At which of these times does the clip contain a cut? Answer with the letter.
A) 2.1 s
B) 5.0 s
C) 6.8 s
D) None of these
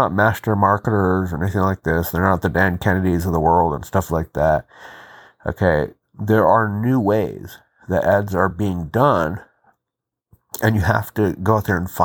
D